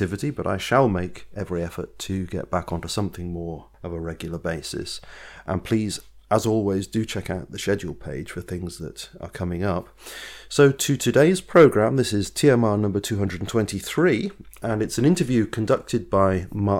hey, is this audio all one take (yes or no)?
yes